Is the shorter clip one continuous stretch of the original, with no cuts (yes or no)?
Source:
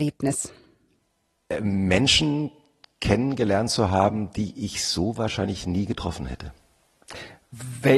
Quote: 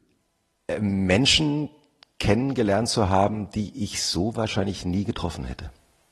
yes